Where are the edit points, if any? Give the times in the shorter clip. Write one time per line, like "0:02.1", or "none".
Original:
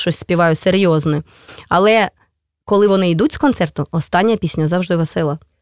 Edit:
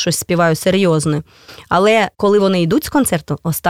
0:02.1